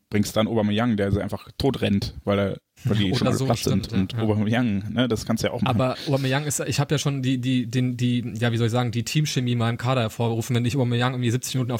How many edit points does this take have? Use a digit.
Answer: 0